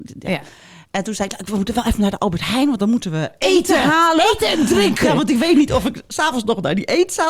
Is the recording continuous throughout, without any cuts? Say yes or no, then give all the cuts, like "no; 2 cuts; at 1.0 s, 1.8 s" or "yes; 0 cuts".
yes; 0 cuts